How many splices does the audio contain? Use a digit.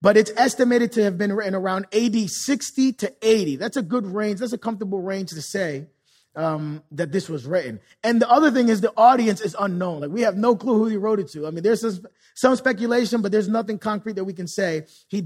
0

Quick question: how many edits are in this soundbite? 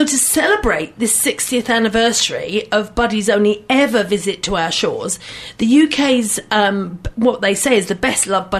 0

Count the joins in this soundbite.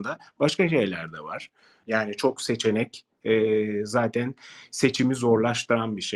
1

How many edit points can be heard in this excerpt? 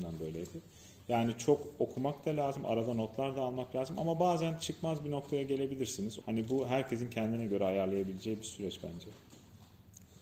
1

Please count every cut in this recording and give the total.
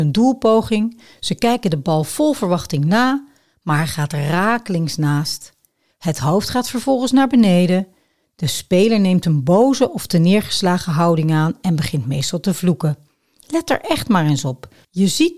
0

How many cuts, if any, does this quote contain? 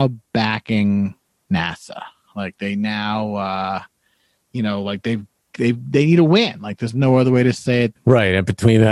1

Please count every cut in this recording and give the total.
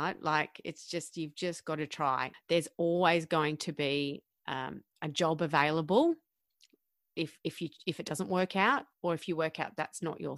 1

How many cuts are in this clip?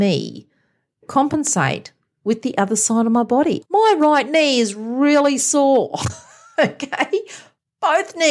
1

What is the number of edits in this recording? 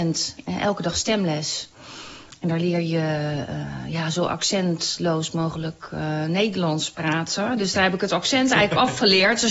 0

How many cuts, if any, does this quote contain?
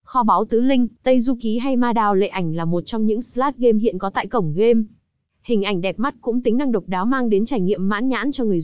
1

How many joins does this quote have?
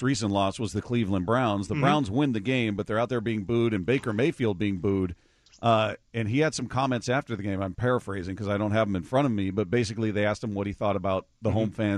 0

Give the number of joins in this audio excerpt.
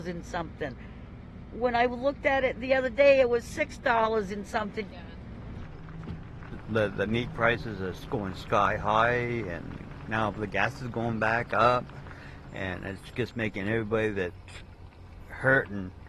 1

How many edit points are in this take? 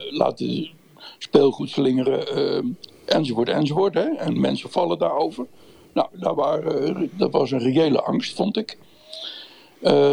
0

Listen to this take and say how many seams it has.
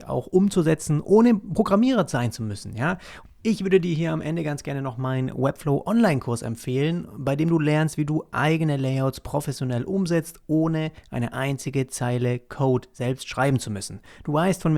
1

